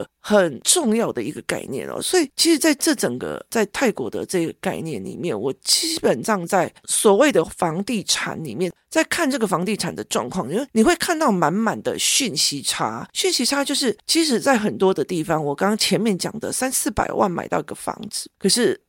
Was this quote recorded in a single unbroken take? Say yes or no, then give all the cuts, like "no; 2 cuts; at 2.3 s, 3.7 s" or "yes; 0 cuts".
yes; 0 cuts